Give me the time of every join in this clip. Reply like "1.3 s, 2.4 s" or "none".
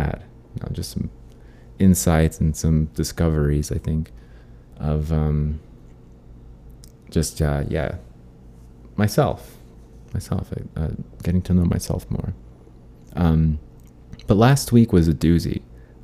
none